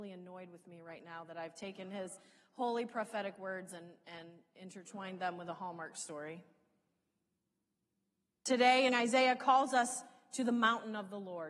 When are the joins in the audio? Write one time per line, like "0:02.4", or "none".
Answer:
0:08.9